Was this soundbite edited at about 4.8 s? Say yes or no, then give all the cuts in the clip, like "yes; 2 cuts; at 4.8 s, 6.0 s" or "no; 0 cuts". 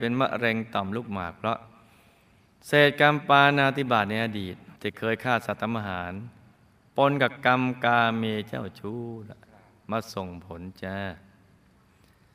yes; 1 cut; at 4.8 s